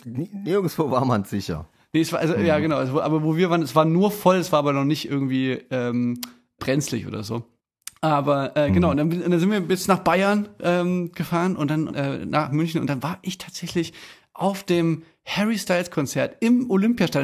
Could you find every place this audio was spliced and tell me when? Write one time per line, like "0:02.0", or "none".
none